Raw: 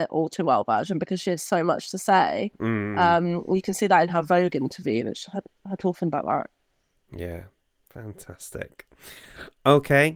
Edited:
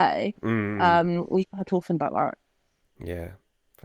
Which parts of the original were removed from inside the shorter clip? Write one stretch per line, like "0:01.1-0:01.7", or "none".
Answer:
0:03.6-0:05.6